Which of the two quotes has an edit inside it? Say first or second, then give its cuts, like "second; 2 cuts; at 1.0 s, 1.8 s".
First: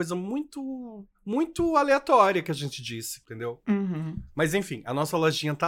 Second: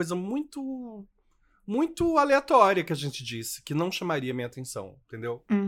first; 2 cuts; at 1.1 s, 3.2 s